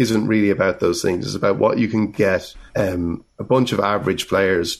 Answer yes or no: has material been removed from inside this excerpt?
yes